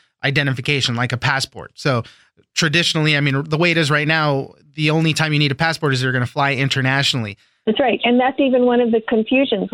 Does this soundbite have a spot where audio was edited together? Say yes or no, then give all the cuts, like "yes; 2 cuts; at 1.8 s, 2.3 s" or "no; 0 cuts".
yes; 1 cut; at 7.6 s